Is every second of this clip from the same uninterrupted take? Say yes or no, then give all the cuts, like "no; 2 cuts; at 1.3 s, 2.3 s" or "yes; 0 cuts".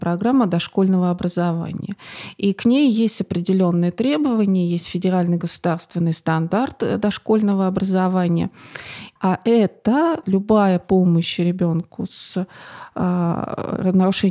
no; 2 cuts; at 9.2 s, 10.2 s